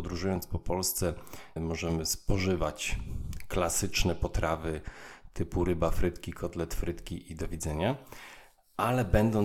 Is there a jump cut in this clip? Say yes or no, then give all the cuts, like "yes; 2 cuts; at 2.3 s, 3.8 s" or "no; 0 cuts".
yes; 1 cut; at 1.6 s